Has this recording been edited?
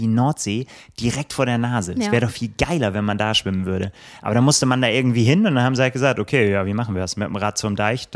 no; 0 cuts

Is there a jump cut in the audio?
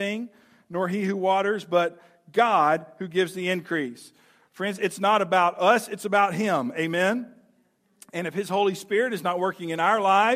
no; 0 cuts

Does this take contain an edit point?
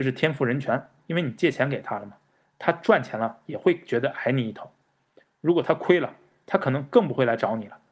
yes; 1 cut; at 1.0 s

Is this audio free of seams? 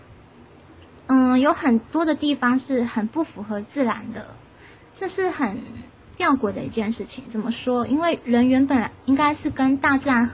yes; 0 cuts

